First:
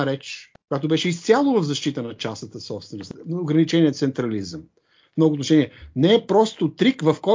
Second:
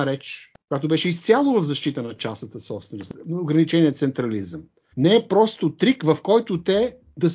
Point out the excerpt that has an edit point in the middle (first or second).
second